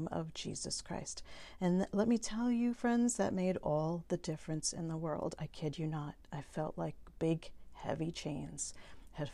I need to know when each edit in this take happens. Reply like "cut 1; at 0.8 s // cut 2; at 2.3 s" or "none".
cut 1; at 5.4 s